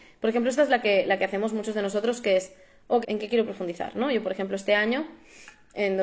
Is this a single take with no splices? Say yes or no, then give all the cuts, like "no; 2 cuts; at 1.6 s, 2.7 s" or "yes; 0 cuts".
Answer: no; 1 cut; at 3.0 s